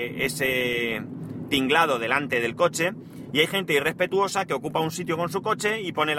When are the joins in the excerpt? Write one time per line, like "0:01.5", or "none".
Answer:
none